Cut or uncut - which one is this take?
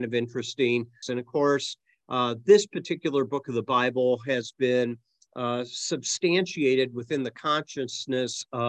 cut